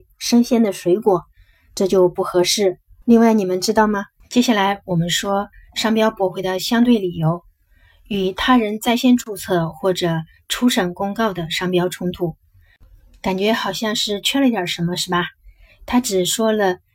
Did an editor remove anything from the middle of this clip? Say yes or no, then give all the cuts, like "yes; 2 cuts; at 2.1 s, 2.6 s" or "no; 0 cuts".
yes; 2 cuts; at 3.0 s, 4.2 s